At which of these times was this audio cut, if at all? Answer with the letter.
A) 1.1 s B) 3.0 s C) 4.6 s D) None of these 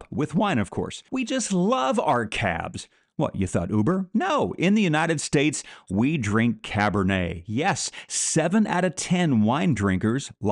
A